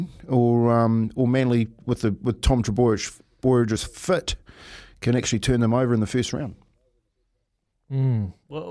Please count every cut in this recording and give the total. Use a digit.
0